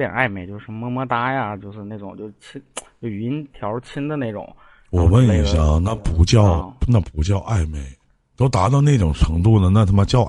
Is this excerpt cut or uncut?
uncut